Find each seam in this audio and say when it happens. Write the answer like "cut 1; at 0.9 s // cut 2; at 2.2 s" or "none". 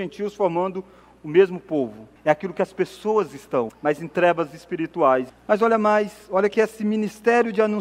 cut 1; at 2.2 s // cut 2; at 3.7 s // cut 3; at 5.3 s